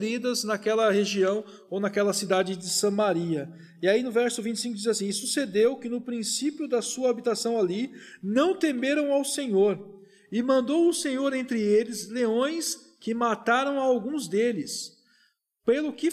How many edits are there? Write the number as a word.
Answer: zero